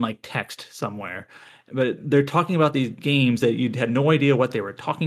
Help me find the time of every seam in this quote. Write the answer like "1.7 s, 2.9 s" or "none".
3.4 s